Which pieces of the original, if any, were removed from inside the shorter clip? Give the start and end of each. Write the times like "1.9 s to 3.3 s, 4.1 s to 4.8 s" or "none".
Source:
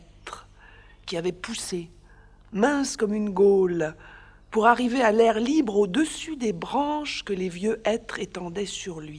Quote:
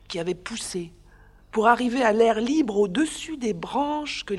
2.4 s to 4.4 s